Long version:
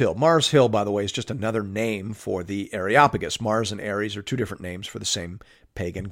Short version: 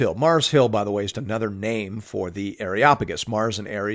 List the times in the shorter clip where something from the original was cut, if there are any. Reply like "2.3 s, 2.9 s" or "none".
1.1 s